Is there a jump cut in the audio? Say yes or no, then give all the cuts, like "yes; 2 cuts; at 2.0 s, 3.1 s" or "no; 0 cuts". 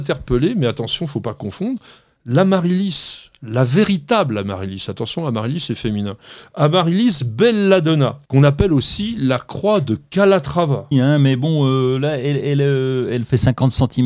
yes; 2 cuts; at 8.2 s, 10.9 s